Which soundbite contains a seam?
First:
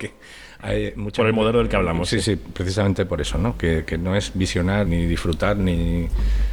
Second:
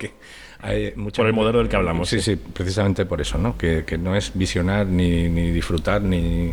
first; 1 cut; at 4.9 s

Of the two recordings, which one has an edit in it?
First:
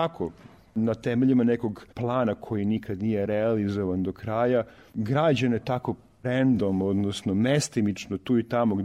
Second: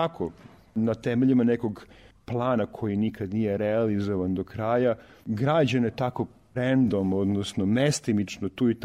first; 1 cut; at 1.9 s

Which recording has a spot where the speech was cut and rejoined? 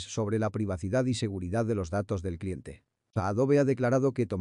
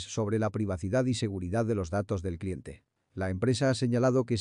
second; 1 cut; at 3.0 s

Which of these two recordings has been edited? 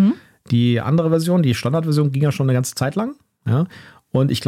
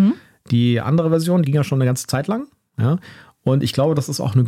second; 1 cut; at 1.4 s

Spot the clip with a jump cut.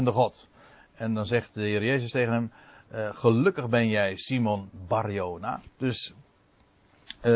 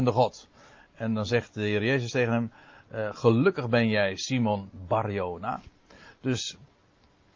first; 1 cut; at 5.7 s

